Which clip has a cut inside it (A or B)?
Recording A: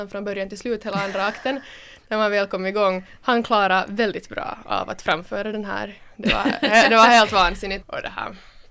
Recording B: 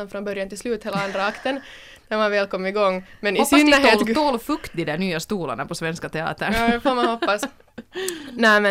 A